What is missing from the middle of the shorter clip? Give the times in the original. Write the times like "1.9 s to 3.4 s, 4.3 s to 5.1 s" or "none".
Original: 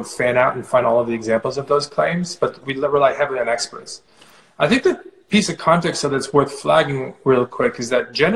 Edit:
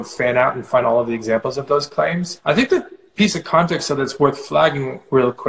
2.4 s to 4.5 s